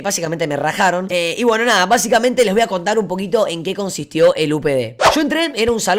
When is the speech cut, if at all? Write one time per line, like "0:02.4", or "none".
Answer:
0:01.1